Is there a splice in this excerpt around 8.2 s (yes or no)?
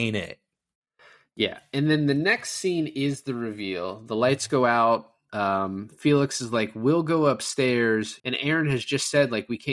yes